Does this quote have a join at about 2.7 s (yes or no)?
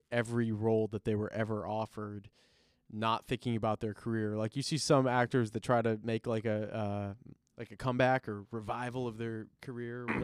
no